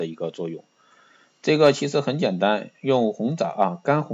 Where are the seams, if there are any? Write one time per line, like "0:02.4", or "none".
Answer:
none